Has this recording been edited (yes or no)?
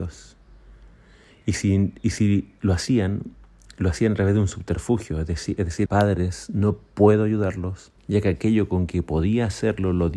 yes